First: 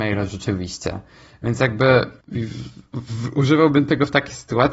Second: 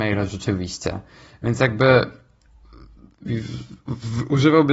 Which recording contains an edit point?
first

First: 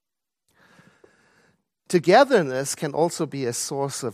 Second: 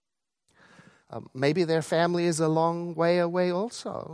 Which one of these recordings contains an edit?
second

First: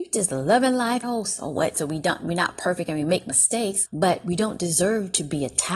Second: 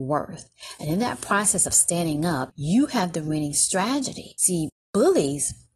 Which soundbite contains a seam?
first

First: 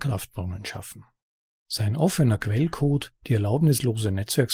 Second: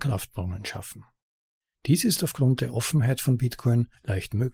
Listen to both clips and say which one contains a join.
first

